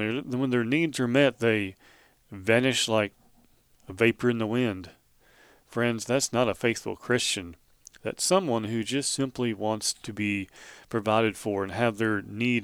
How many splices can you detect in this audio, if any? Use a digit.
0